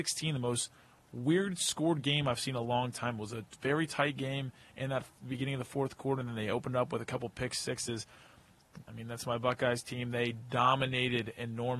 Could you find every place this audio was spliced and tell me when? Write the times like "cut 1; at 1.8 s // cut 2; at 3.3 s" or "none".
cut 1; at 8.8 s